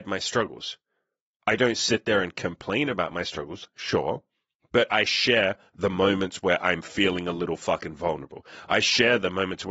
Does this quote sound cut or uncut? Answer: uncut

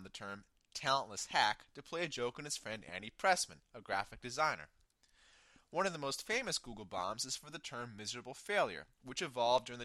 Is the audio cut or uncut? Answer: uncut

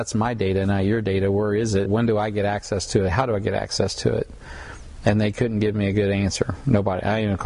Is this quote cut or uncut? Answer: cut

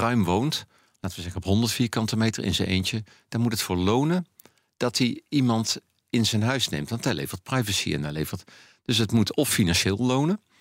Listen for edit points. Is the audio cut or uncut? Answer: uncut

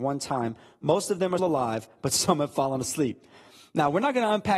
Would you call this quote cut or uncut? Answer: cut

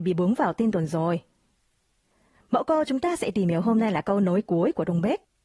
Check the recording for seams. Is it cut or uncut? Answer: uncut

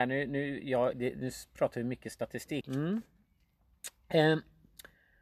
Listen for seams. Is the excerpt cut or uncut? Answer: cut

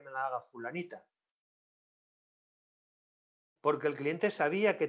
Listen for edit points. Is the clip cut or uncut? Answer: cut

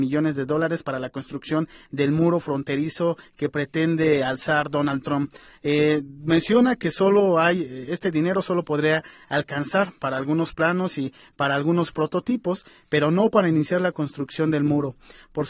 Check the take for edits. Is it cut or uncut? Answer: uncut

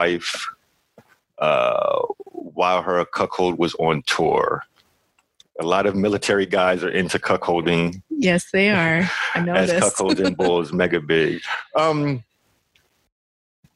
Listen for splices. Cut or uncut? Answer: uncut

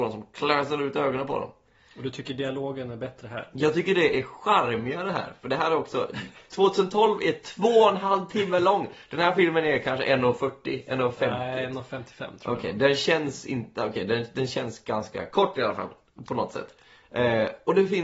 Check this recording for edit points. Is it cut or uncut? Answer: uncut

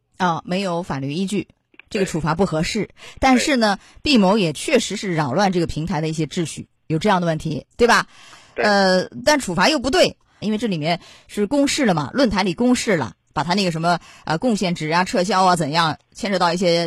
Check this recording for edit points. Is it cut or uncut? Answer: cut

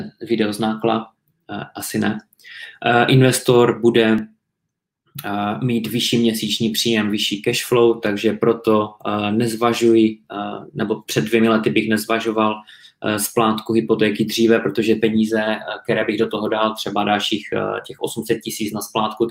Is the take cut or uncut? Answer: uncut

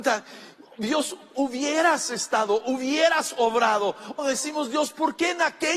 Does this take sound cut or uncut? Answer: cut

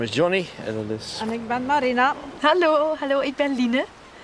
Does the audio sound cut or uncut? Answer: uncut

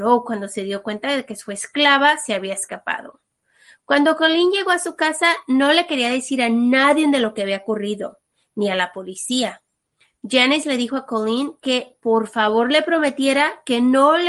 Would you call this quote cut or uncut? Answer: uncut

